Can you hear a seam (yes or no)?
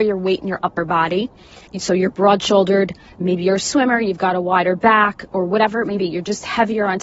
yes